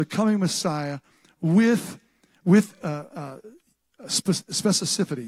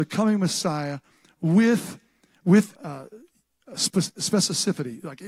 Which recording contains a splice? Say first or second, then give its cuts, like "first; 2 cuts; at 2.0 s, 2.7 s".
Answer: second; 1 cut; at 2.8 s